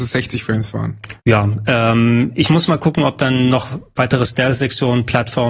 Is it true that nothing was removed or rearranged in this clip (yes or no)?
no